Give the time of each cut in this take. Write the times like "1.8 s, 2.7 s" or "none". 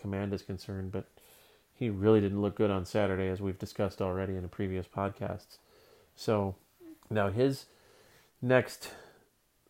7.0 s